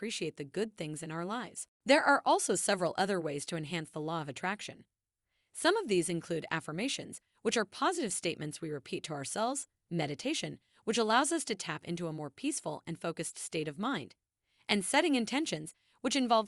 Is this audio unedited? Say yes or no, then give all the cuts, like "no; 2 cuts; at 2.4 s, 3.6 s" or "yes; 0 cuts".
no; 1 cut; at 1.7 s